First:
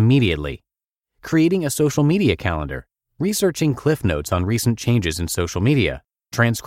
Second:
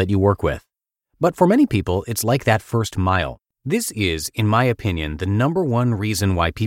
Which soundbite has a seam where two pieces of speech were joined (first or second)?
second